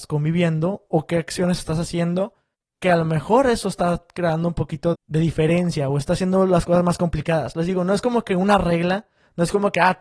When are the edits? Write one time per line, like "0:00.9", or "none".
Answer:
0:04.9